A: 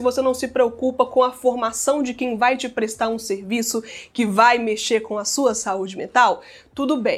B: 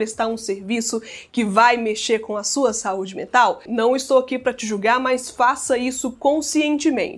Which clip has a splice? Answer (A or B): B